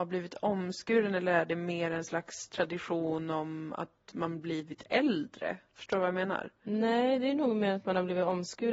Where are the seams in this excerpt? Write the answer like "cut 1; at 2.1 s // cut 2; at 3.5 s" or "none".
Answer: none